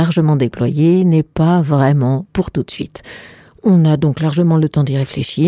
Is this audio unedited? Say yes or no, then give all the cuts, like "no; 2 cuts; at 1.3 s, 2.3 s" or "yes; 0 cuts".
yes; 0 cuts